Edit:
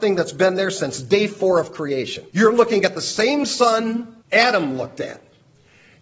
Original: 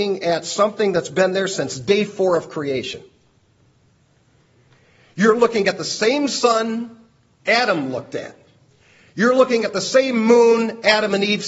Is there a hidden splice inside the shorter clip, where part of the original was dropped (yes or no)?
yes